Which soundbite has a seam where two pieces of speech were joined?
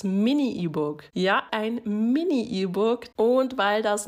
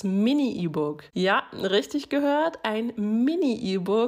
first; 2 cuts; at 1.5 s, 3.1 s

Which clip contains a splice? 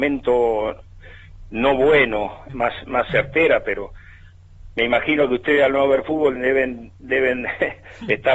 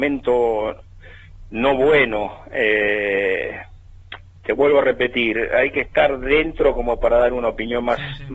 first; 2 cuts; at 2.5 s, 6.4 s

